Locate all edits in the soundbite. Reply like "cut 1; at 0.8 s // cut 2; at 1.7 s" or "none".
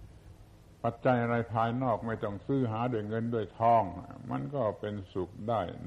cut 1; at 1.0 s